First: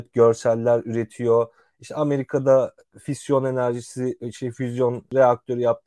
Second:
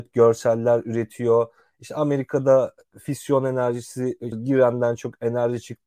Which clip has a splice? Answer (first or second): second